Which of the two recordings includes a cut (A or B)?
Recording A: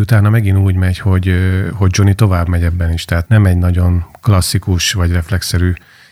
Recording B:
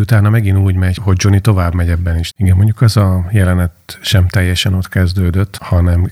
B